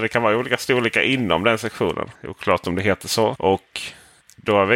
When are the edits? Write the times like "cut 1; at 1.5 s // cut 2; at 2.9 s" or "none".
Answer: cut 1; at 2.1 s // cut 2; at 3.3 s